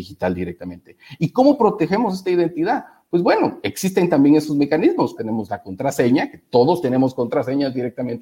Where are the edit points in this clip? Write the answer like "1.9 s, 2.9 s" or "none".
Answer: 5.2 s